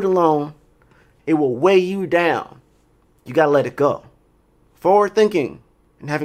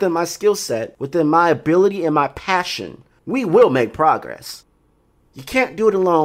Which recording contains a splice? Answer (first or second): first